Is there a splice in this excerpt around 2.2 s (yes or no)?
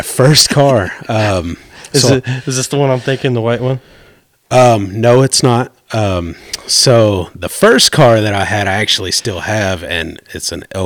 no